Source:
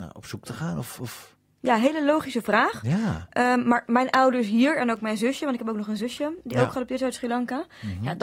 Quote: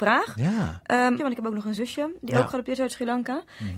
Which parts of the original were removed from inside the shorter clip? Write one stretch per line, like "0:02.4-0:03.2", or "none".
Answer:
0:03.6-0:05.4